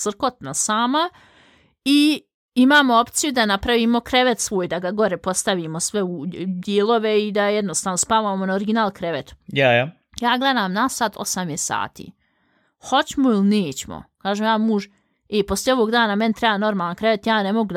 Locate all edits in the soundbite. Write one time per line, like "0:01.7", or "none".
none